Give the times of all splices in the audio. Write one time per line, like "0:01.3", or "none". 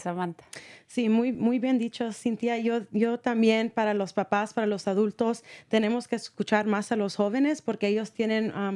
none